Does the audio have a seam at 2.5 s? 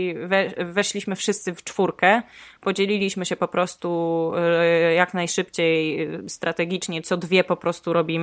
no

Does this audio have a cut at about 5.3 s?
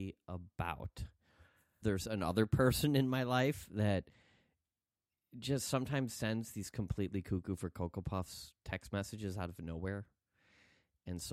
no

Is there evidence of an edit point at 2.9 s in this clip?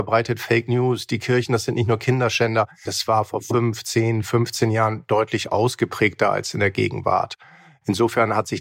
yes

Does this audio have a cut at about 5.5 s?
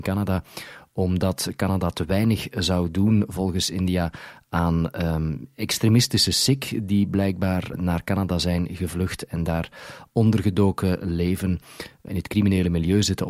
no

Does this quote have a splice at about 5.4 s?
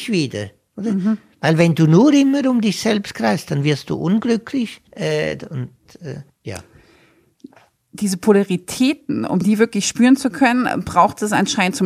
yes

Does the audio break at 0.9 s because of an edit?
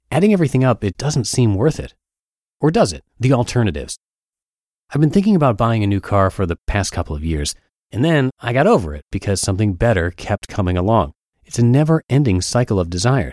yes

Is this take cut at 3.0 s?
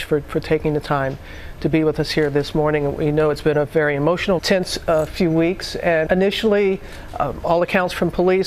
no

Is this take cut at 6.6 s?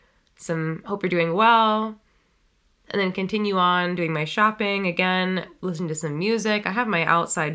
no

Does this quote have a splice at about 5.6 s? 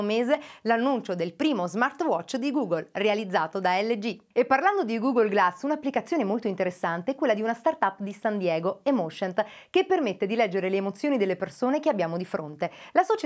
no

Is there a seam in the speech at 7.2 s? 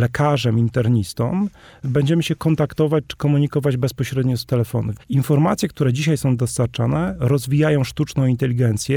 no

